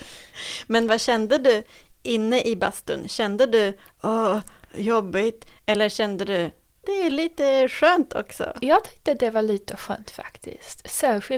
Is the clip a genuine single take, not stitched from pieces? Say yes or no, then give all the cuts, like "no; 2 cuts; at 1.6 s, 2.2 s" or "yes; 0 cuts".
no; 1 cut; at 6.8 s